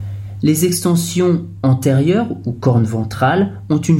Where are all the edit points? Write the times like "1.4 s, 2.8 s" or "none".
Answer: none